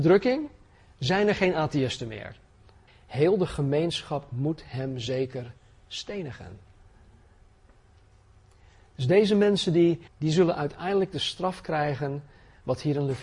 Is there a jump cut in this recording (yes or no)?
yes